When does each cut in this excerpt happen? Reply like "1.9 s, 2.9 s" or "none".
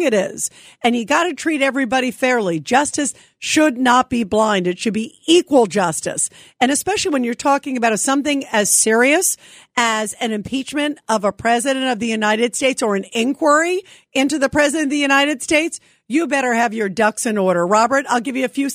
none

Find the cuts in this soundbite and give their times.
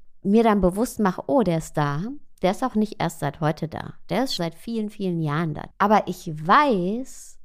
4.4 s, 5.7 s

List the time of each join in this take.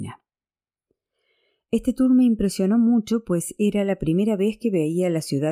none

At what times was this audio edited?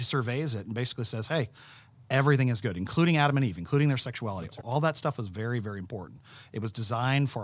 4.6 s

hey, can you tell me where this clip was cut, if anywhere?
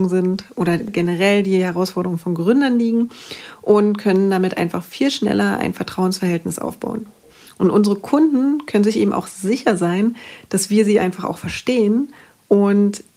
none

